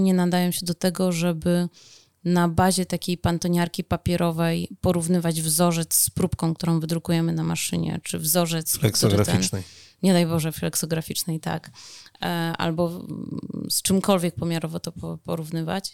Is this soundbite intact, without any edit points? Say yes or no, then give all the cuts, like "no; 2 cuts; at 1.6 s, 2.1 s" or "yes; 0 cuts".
yes; 0 cuts